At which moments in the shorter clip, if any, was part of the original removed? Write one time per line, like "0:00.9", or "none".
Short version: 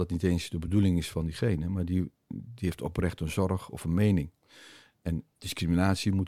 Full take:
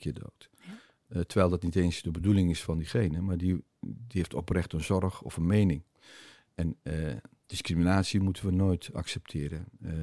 0:05.3